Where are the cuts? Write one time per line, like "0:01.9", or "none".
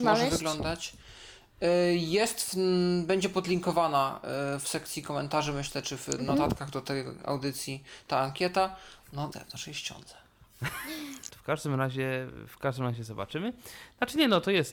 0:09.3
0:11.3